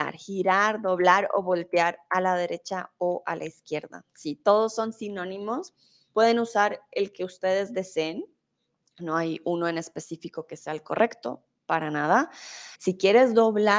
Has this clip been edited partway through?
yes; 1 cut; at 12.7 s

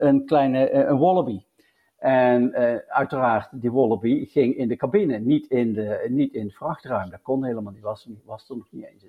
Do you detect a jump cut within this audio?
no; 0 cuts

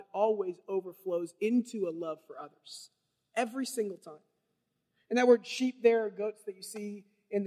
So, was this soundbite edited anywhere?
no; 0 cuts

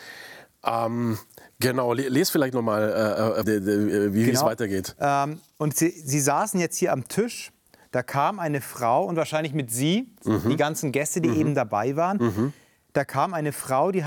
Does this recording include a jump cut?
yes; 1 cut; at 3.4 s

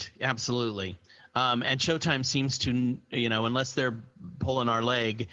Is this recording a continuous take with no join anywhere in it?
yes; 0 cuts

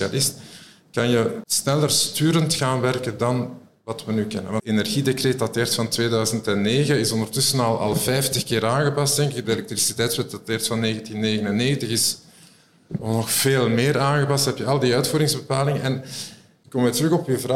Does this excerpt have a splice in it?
no; 0 cuts

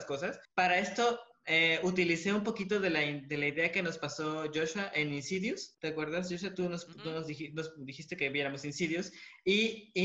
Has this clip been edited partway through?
no; 0 cuts

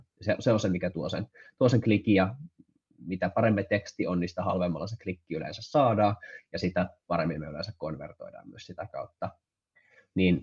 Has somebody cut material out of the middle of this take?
no; 0 cuts

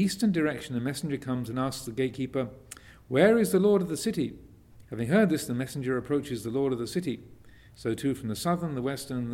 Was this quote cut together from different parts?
yes; 2 cuts; at 4.8 s, 7.7 s

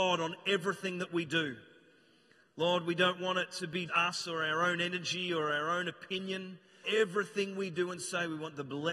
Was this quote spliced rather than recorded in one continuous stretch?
yes; 2 cuts; at 3.9 s, 6.8 s

